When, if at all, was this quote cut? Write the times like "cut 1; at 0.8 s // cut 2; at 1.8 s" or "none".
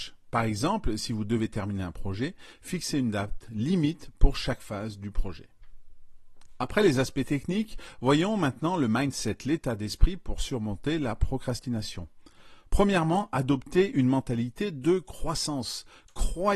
none